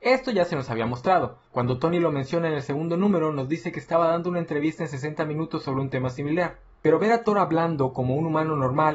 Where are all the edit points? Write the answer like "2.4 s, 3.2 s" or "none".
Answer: none